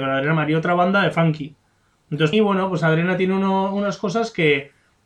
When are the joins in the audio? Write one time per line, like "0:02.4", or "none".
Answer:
0:02.3